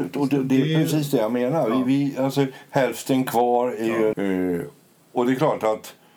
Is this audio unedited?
no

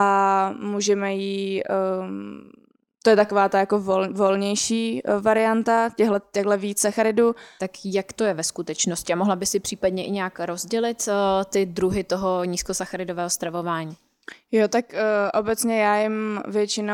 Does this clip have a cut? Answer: yes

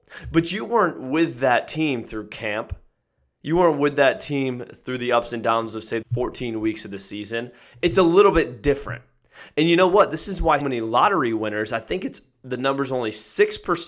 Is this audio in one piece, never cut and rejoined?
no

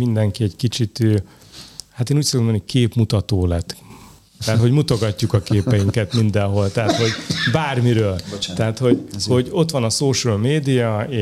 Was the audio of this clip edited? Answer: no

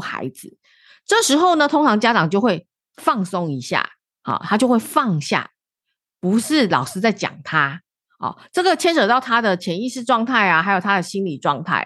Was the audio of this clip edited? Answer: no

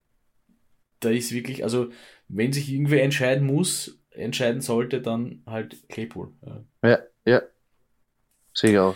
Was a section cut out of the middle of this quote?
no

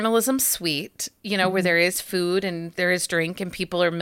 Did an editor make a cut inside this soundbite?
no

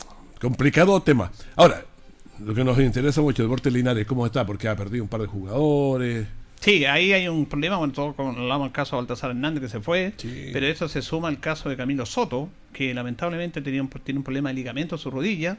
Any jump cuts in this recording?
no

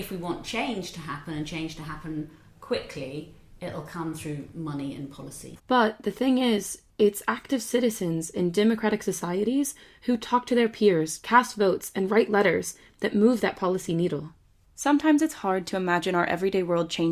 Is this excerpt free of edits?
no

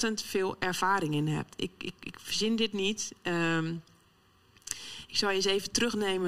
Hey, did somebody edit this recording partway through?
no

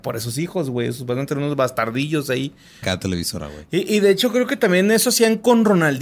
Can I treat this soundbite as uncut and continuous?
no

